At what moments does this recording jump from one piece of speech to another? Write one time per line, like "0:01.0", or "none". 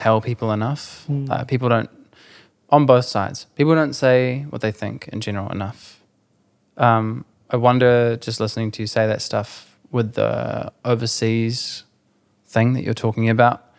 none